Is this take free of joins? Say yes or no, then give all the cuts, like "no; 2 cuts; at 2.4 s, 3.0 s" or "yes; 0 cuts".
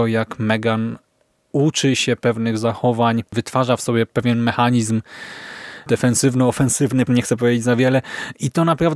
no; 2 cuts; at 3.3 s, 7.1 s